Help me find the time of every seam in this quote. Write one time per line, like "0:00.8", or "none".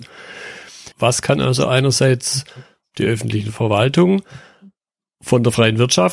0:00.9